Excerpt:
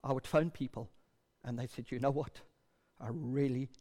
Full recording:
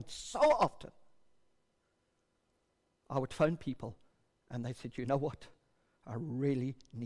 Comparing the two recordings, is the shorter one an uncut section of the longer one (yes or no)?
yes